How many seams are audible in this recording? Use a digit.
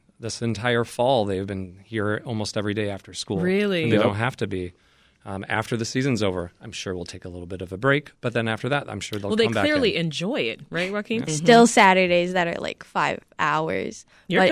1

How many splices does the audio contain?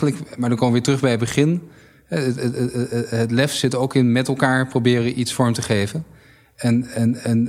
0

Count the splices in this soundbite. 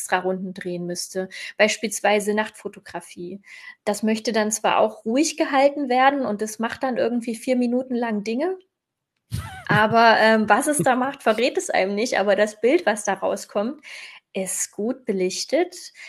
1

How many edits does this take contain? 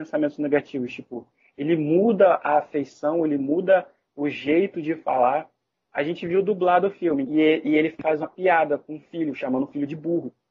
1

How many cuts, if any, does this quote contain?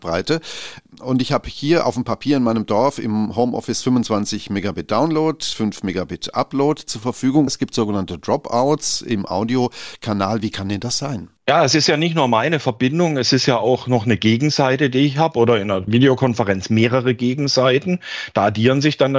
3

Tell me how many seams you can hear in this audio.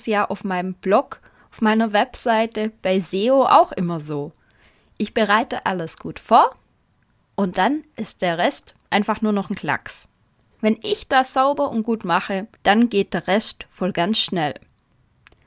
2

